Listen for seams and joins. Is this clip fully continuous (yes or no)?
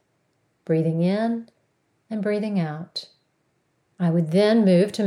no